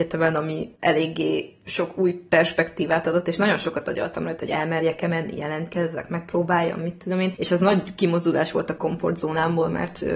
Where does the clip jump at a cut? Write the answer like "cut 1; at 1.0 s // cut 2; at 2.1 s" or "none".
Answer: none